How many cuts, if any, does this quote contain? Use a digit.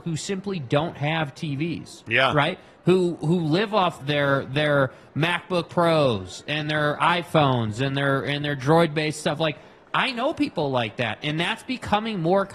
1